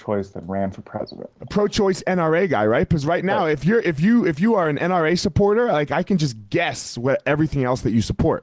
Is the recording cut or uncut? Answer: uncut